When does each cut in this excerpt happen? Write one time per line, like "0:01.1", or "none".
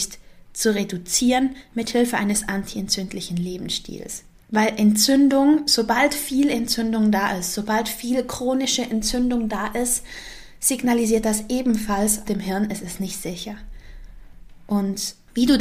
0:12.2

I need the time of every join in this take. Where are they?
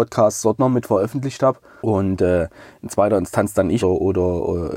0:01.8
0:03.8

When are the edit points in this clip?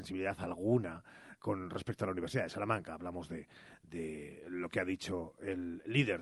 0:01.4

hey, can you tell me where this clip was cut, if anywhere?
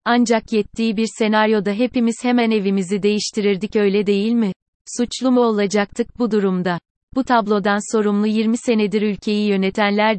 none

